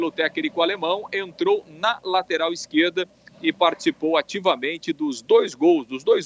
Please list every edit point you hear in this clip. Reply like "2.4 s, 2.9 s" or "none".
none